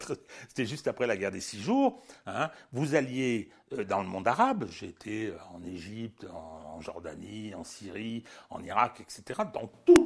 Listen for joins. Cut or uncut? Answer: uncut